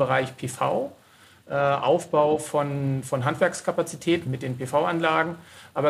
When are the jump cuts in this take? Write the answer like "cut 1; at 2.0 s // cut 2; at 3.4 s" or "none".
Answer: cut 1; at 4.3 s